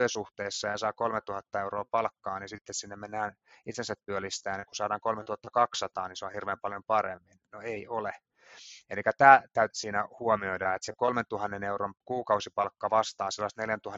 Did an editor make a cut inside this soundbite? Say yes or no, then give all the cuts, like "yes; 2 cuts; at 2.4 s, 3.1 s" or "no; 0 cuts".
yes; 2 cuts; at 9.7 s, 12.0 s